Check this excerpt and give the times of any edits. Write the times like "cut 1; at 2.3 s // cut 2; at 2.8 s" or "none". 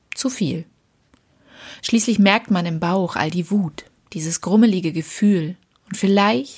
cut 1; at 1.8 s